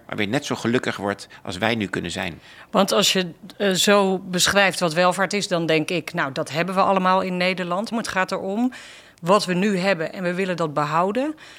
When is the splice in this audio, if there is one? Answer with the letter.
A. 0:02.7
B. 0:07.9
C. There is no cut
B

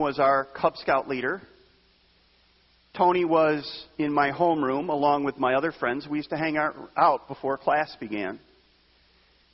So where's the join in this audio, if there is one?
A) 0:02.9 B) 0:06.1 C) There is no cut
C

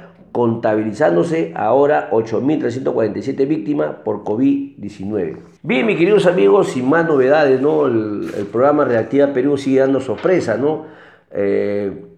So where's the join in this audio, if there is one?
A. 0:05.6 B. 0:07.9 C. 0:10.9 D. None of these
A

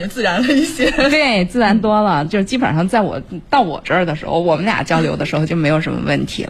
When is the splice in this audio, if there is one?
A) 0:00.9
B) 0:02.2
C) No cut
C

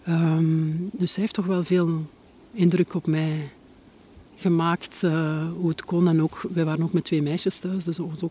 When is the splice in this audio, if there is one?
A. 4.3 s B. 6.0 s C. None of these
A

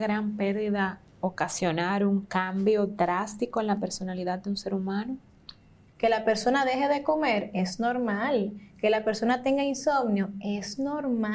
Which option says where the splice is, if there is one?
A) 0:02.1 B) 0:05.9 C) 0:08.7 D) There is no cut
B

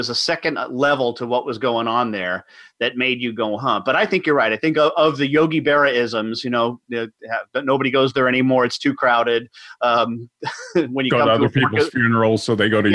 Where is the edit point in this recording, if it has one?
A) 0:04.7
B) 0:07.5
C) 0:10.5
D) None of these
B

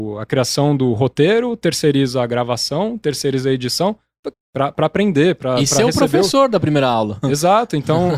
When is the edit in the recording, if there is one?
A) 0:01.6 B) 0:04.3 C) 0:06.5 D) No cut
B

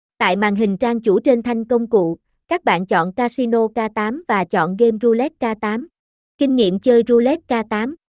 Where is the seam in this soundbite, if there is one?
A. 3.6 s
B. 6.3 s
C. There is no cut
B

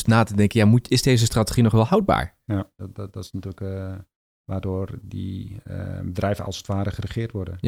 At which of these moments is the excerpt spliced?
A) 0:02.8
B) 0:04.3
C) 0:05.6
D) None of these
A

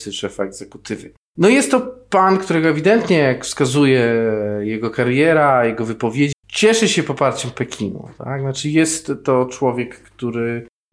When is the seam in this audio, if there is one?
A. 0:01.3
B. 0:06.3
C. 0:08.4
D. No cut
B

